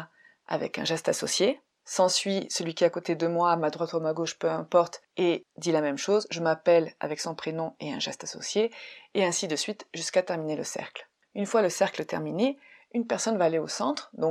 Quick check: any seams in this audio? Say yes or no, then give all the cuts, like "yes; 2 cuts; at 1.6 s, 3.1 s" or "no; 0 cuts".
no; 0 cuts